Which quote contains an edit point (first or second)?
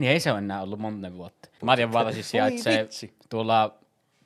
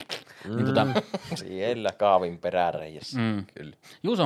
first